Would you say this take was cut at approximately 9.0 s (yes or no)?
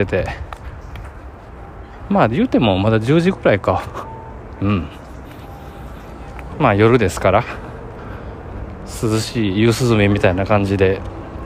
no